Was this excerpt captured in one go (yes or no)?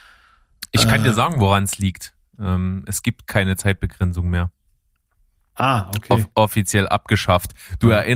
yes